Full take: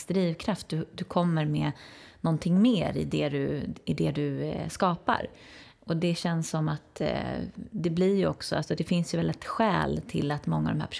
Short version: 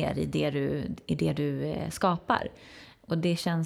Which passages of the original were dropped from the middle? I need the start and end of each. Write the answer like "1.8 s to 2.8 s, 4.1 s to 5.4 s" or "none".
none